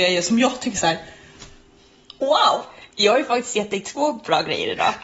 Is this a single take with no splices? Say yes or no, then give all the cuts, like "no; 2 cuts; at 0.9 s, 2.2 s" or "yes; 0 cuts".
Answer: yes; 0 cuts